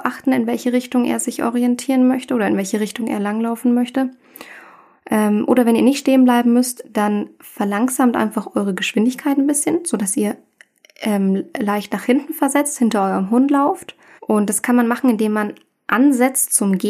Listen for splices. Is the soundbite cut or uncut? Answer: cut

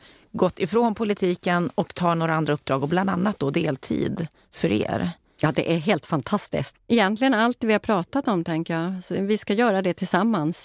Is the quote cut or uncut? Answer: cut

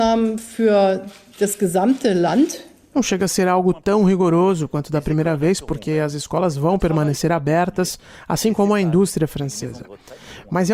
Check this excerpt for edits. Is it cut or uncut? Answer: cut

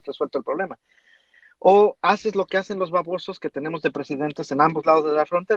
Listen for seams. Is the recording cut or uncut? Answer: uncut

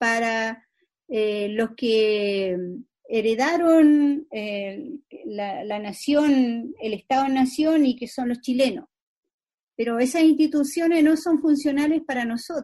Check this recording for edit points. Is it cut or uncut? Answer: uncut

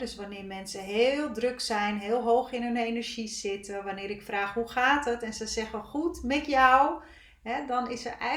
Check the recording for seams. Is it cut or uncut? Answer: uncut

